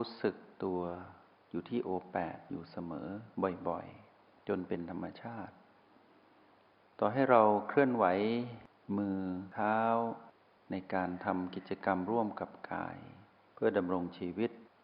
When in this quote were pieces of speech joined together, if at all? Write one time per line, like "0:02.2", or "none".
none